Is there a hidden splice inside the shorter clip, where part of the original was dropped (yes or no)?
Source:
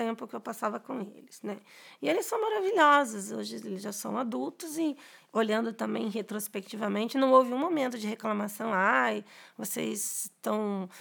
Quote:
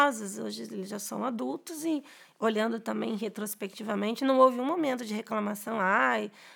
no